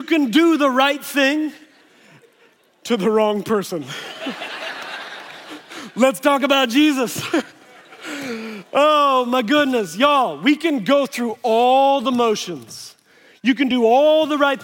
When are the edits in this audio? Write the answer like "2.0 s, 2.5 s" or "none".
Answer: none